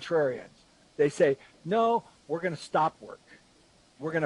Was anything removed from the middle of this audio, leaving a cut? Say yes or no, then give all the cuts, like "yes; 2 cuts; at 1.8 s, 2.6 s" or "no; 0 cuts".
no; 0 cuts